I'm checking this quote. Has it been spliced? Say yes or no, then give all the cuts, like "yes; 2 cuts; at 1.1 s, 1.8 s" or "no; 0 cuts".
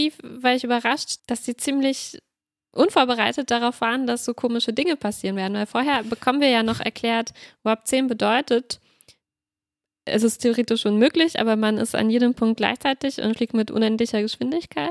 yes; 1 cut; at 1.2 s